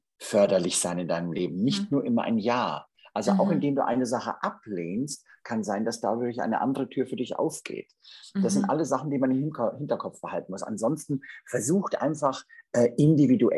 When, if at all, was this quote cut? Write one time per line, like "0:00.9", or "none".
none